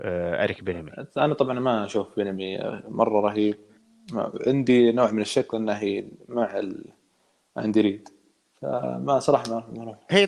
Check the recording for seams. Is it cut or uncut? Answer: uncut